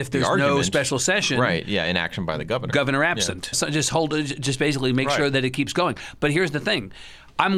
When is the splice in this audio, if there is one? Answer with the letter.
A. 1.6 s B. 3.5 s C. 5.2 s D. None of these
B